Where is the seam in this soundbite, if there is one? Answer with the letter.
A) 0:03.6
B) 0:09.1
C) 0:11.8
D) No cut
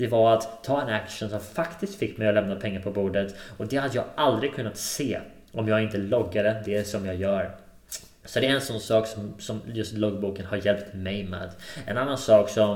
D